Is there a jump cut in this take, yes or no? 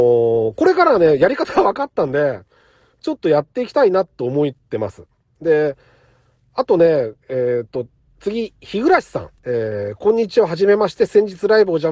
yes